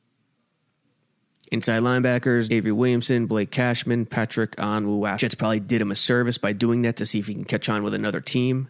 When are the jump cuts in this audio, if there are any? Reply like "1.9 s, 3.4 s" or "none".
2.5 s, 5.2 s